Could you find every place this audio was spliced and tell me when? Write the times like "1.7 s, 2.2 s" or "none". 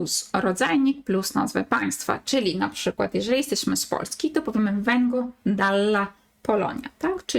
none

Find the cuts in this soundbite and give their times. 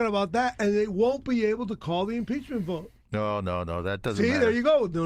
none

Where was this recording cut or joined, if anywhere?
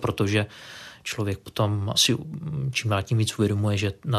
1.9 s

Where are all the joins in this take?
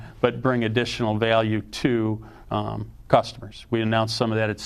none

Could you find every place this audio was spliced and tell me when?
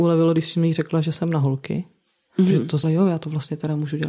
2.8 s

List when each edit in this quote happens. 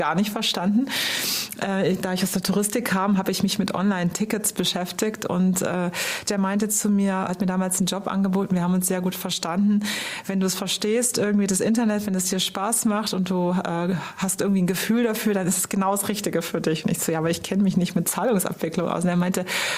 6.3 s, 7.3 s

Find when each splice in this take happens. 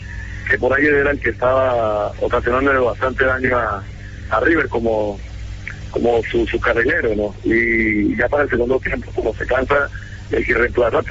none

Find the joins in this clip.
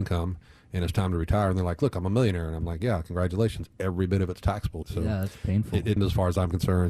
4.8 s, 6.0 s

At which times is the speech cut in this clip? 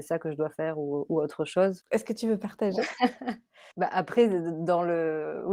1.8 s, 3.7 s

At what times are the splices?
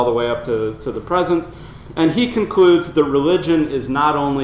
none

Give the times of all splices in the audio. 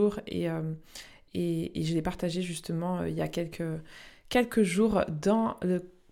none

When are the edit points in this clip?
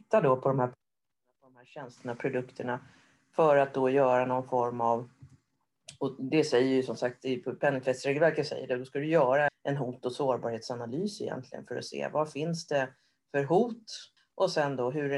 9.5 s, 14.2 s

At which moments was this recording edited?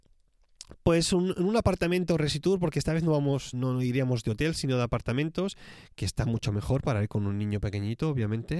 3.5 s

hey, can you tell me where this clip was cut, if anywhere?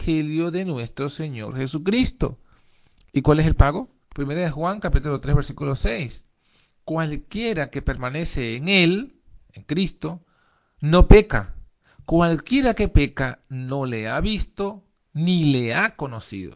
4.0 s, 9.5 s

